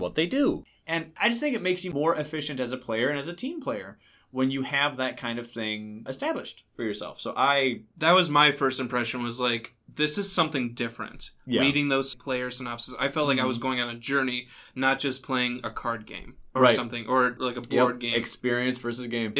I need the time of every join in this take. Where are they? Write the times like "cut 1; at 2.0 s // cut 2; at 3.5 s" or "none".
none